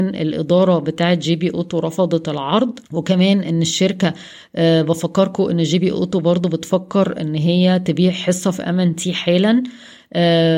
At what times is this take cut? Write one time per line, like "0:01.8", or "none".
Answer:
0:02.9